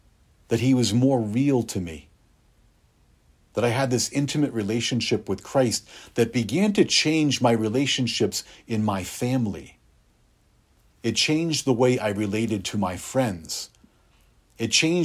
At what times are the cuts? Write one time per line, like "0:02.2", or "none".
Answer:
none